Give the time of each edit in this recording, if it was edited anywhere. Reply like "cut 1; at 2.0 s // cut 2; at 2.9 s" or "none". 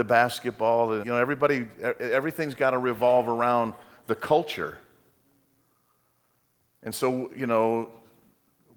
cut 1; at 1.0 s